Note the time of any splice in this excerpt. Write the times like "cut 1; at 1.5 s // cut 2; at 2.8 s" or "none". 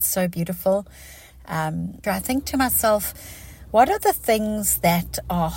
cut 1; at 2.0 s